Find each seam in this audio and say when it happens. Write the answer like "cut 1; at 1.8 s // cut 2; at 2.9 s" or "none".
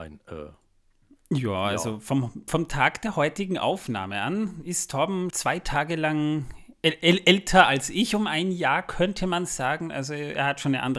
cut 1; at 5.3 s